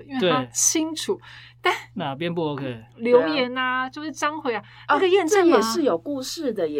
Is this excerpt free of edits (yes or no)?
yes